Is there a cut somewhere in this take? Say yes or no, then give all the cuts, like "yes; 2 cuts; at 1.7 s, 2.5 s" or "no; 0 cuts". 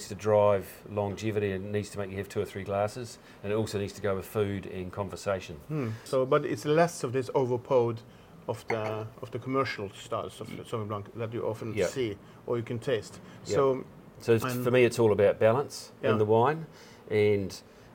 yes; 1 cut; at 6.1 s